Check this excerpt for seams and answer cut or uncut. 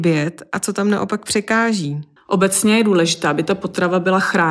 cut